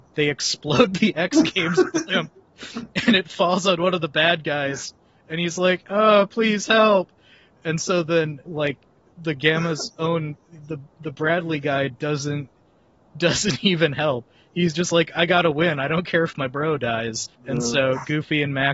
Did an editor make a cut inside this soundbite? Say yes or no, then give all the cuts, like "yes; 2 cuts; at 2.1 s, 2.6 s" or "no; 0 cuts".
yes; 2 cuts; at 8.5 s, 17.3 s